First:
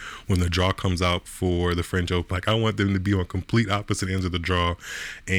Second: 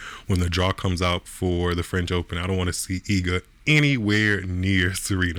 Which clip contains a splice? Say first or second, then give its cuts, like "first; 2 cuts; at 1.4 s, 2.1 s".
first; 1 cut; at 2.3 s